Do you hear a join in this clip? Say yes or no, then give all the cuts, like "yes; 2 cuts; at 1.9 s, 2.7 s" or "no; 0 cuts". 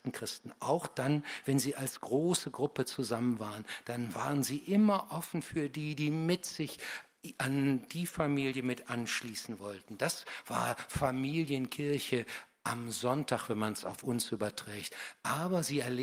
no; 0 cuts